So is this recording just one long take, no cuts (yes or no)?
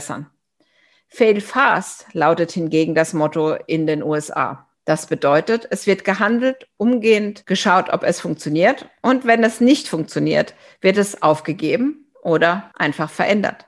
yes